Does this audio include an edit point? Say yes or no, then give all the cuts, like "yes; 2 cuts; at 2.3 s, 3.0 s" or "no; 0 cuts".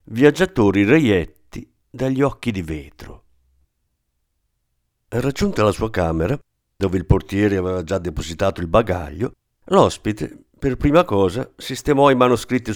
no; 0 cuts